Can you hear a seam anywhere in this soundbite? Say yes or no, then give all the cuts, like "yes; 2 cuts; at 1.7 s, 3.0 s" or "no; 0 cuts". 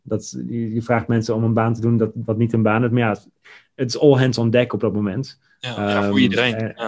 no; 0 cuts